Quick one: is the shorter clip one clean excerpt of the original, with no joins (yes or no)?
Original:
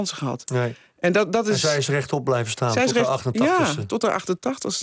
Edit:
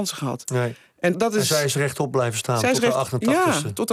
no